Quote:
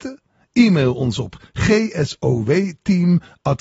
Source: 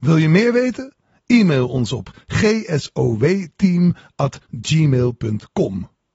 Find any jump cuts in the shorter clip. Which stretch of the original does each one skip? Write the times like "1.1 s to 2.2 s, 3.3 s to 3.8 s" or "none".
none